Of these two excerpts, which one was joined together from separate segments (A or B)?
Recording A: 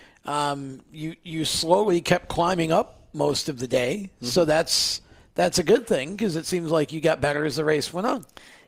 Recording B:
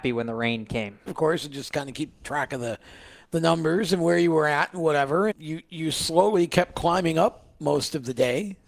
B